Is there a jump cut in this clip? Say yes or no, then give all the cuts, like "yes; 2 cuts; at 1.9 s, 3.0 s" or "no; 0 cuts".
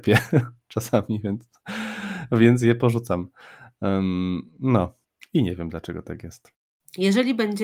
no; 0 cuts